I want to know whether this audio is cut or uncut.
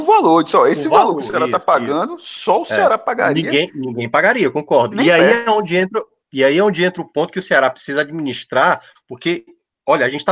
uncut